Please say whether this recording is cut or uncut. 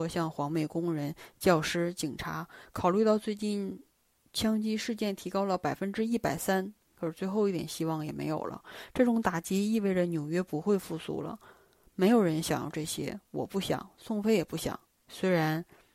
uncut